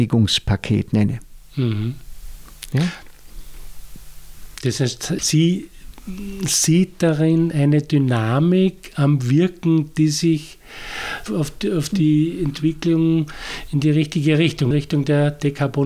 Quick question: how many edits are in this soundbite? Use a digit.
3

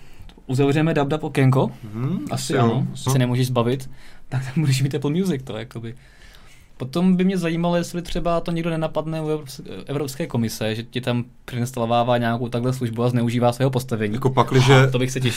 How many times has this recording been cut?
1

